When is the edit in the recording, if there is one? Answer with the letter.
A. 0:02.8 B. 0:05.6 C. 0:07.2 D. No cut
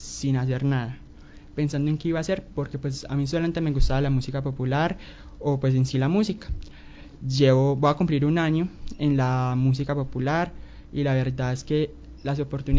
C